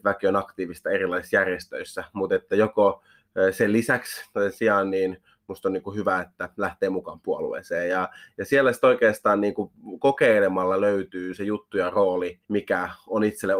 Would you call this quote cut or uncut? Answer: cut